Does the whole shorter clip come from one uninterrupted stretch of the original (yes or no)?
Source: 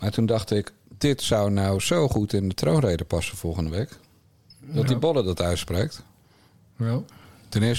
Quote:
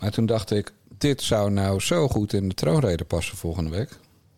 yes